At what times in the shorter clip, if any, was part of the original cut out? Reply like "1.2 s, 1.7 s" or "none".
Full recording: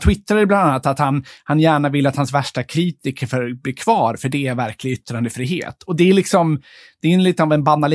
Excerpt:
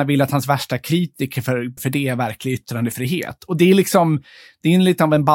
1.8 s